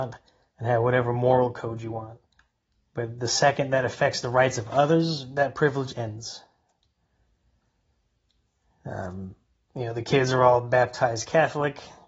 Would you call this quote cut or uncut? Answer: uncut